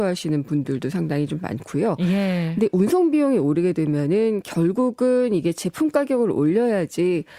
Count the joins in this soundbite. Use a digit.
0